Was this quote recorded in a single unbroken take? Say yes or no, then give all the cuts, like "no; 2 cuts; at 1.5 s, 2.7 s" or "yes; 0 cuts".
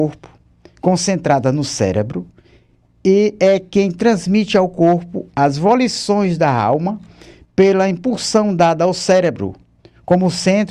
yes; 0 cuts